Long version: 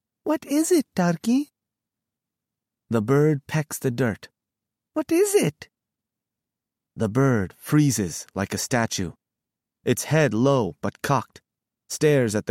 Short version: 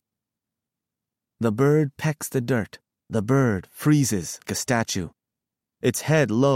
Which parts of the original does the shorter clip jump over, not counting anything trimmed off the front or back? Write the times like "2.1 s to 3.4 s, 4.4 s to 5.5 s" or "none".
4.5 s to 6.9 s, 8.3 s to 8.5 s